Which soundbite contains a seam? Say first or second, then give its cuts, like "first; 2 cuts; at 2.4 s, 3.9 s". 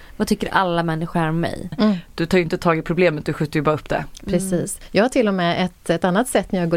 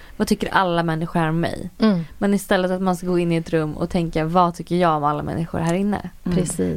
first; 1 cut; at 1.7 s